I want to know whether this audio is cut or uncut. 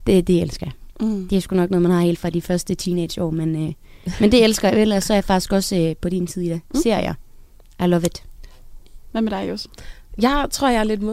uncut